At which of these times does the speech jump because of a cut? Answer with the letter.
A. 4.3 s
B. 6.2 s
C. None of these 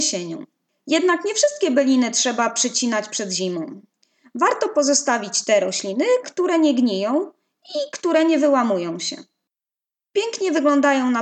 B